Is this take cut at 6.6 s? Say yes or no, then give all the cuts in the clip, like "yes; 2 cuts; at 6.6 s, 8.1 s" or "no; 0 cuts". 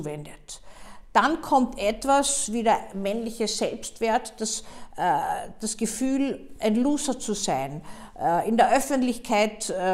no; 0 cuts